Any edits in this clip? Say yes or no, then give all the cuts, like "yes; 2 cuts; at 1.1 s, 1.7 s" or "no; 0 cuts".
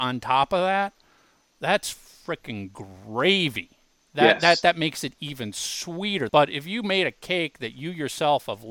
yes; 1 cut; at 6.3 s